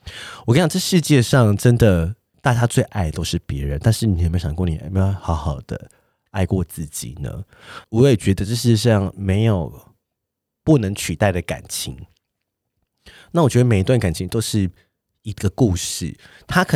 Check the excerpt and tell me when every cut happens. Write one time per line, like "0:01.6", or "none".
none